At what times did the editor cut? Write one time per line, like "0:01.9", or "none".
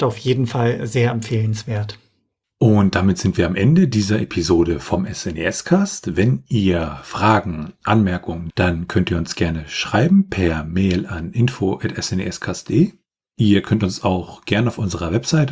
0:08.5